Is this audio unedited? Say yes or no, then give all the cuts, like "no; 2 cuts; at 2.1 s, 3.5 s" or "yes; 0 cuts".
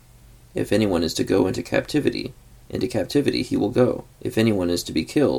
no; 1 cut; at 4.1 s